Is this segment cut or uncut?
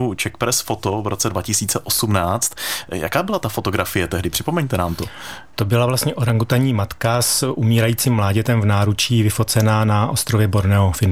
uncut